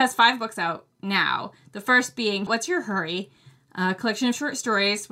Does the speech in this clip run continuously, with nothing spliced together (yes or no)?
no